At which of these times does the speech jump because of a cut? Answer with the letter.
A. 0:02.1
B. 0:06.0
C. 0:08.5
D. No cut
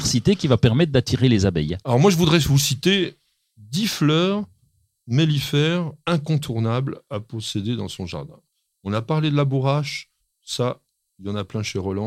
B